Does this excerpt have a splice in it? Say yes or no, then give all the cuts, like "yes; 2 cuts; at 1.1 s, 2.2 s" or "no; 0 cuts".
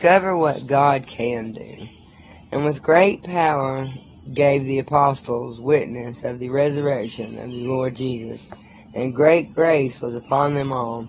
no; 0 cuts